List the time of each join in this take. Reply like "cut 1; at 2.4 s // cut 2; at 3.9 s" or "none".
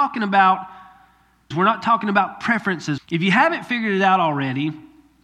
cut 1; at 1.5 s // cut 2; at 3.0 s